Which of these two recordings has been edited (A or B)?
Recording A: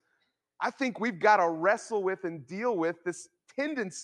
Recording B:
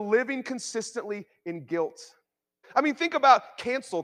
B